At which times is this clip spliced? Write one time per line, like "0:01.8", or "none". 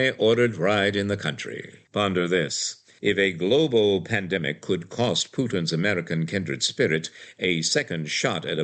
0:01.8